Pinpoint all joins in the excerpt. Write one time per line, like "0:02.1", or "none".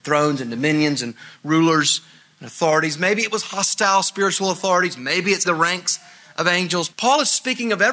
0:05.4
0:06.9

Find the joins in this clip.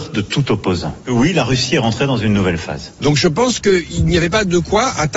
0:01.0
0:03.0

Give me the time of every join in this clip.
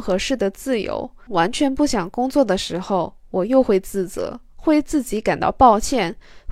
0:01.3

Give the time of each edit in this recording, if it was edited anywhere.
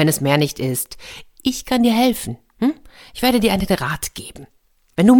none

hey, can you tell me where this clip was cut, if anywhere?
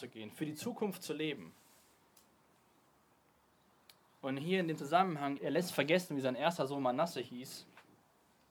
0:05.4

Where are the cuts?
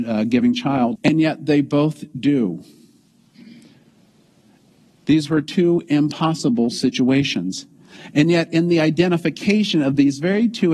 0:01.0

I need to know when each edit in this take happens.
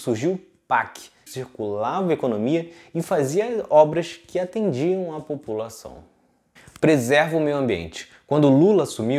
0:01.3

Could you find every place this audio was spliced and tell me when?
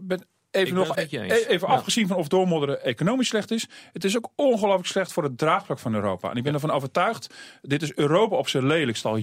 0:00.9

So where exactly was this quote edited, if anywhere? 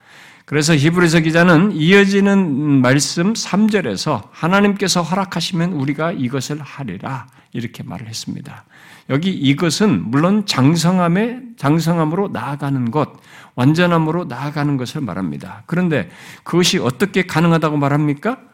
none

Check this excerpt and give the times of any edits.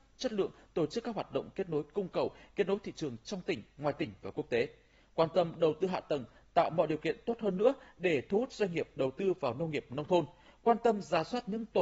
none

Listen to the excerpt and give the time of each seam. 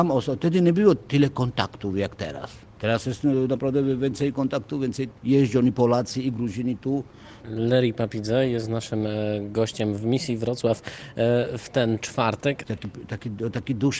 0:07.4
0:12.6

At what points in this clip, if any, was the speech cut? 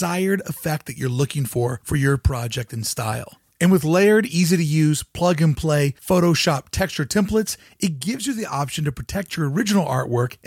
none

